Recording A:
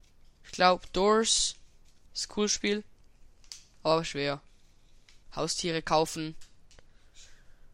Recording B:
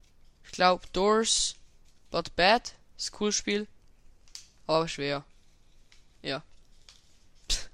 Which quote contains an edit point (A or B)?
A